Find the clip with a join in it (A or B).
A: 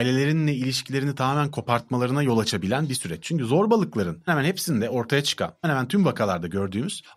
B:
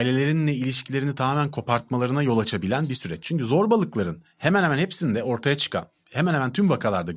A